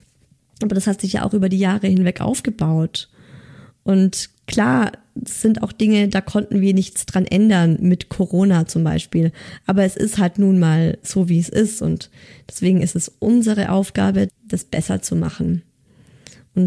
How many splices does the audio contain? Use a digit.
1